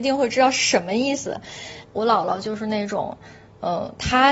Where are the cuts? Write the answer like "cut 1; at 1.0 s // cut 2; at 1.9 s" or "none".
cut 1; at 1.8 s